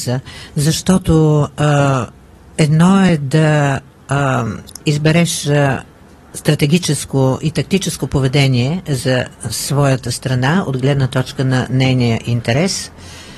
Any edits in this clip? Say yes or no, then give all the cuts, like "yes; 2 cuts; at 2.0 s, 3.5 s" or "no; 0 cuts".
no; 0 cuts